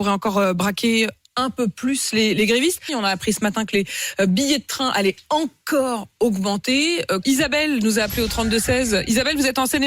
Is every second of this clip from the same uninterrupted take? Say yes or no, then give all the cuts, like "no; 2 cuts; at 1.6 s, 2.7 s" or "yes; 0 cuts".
no; 2 cuts; at 2.9 s, 7.2 s